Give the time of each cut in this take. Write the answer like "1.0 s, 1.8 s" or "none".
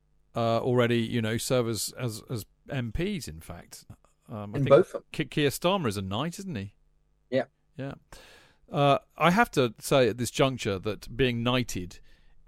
1.9 s, 3.9 s